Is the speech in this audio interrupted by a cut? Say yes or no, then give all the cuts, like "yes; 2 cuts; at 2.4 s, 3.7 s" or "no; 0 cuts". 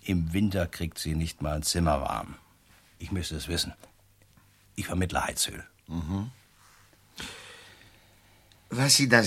no; 0 cuts